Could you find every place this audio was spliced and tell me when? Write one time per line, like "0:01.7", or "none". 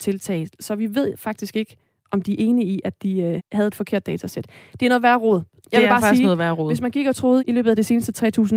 0:03.4
0:07.4